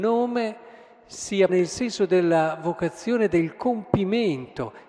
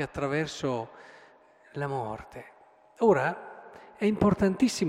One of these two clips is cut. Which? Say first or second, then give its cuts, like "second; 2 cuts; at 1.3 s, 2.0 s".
first; 1 cut; at 1.5 s